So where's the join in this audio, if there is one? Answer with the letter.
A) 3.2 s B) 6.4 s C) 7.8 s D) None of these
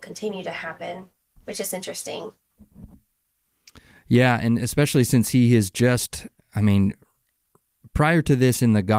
D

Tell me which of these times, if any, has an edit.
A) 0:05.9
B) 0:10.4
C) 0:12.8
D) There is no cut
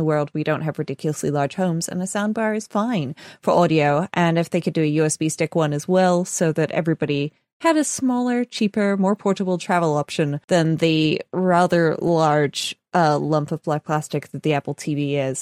B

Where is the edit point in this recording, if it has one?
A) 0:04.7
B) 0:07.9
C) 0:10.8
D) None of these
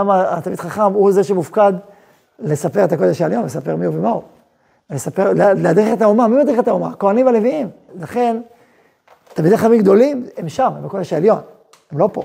B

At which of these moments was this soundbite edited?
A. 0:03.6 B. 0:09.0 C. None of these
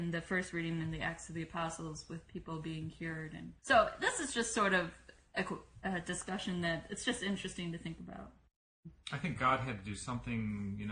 A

